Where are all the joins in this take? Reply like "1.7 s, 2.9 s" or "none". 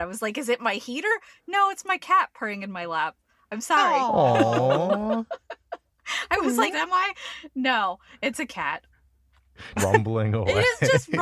6.7 s, 9.8 s